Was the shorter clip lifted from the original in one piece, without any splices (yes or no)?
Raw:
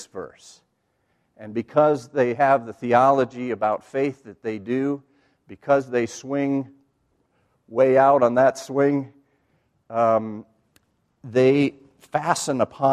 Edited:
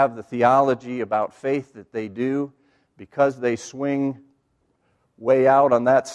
yes